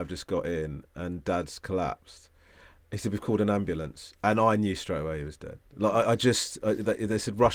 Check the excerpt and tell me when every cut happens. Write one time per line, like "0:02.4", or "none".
none